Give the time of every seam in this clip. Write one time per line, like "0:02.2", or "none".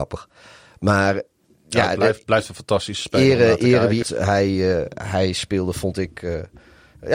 0:04.0